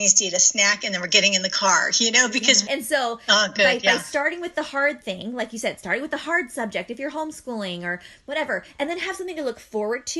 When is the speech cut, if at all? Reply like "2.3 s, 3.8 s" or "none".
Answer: 2.7 s